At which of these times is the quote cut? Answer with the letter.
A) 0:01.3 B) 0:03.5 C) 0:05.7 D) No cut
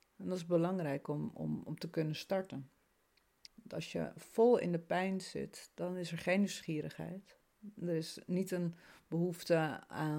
B